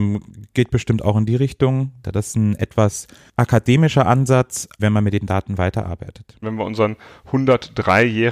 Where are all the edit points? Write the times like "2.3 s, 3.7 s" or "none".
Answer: 2.0 s, 4.8 s, 6.4 s